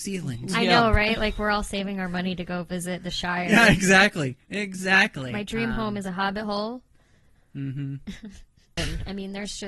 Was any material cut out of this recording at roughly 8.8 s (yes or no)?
yes